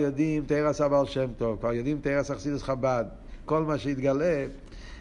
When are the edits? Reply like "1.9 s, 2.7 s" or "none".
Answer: 3.5 s